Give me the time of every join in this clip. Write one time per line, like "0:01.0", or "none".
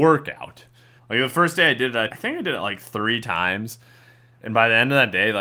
0:01.0
0:02.1